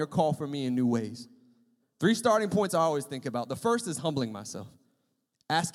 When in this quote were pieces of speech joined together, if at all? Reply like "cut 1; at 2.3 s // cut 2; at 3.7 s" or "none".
cut 1; at 1.8 s